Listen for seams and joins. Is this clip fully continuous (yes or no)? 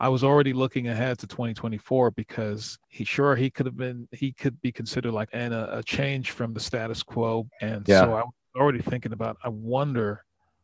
no